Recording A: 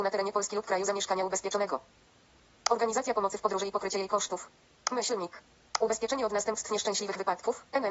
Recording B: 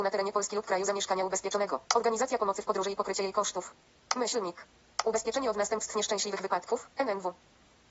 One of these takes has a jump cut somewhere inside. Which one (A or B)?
B